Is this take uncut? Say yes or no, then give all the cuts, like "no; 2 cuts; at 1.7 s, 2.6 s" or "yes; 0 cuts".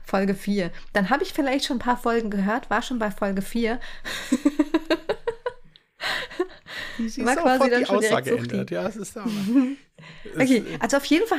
yes; 0 cuts